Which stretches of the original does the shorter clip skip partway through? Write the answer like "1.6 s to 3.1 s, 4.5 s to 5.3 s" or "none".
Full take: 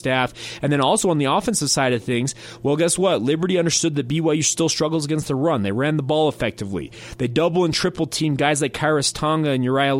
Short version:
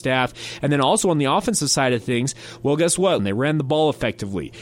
3.2 s to 5.6 s